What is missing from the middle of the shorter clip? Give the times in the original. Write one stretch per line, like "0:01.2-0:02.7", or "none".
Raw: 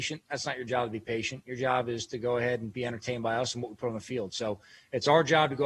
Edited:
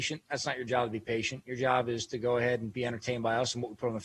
none